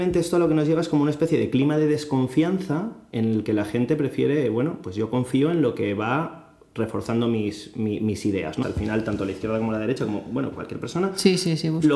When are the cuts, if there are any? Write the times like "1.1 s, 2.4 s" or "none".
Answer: 8.6 s